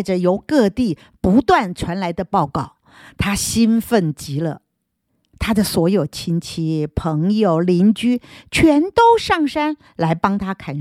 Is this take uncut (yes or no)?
no